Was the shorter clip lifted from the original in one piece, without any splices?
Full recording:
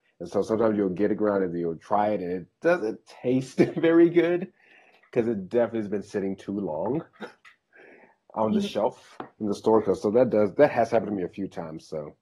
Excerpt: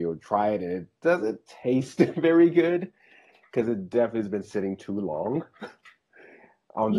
yes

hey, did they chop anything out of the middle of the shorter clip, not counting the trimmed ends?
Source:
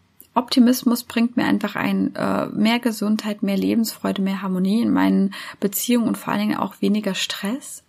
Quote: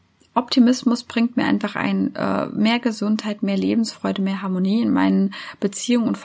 no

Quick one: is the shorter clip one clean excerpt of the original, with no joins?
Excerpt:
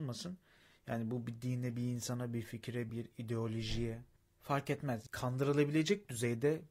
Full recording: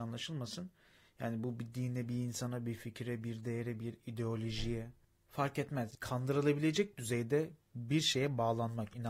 no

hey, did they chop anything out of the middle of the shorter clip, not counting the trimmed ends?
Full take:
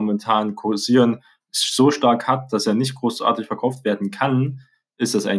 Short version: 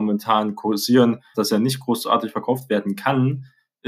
yes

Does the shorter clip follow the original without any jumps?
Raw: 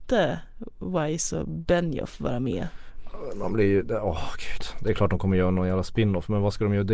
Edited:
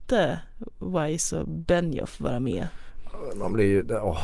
yes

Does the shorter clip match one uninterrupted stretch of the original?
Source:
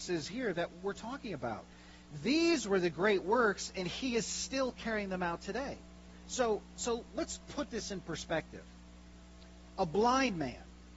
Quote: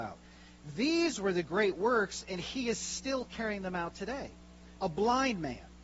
no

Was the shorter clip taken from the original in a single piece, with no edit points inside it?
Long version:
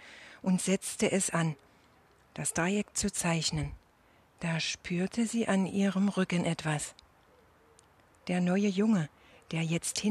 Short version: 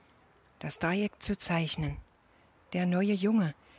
no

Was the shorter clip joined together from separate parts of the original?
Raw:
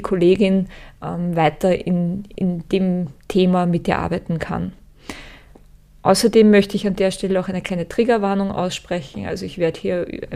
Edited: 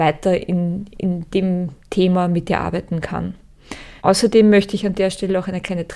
yes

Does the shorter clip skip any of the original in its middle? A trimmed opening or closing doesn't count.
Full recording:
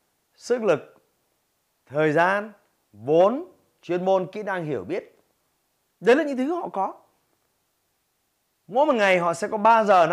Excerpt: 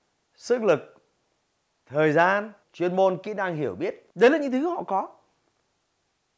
yes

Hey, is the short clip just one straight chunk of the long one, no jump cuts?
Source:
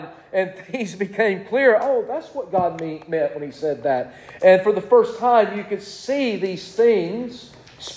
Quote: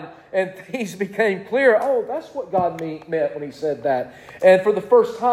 yes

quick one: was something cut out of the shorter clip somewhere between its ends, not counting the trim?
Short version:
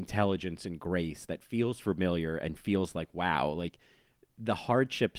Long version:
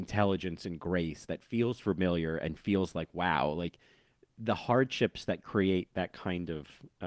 no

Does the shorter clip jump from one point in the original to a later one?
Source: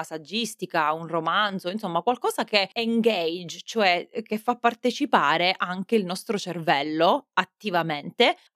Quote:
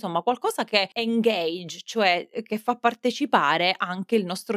no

